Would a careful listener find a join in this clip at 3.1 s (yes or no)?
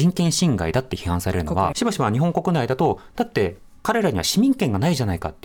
no